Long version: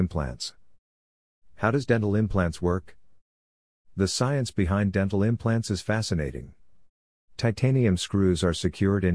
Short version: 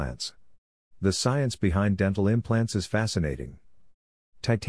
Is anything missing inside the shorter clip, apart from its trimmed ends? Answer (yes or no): yes